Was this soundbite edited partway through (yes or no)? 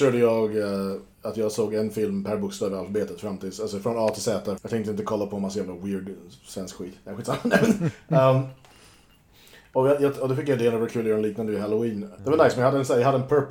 yes